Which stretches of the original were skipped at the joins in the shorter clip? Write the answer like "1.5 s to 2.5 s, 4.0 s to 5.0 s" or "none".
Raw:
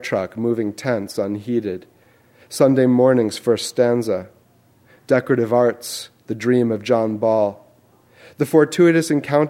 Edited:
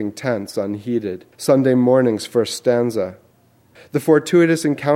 1.9 s to 2.4 s, 4.9 s to 8.2 s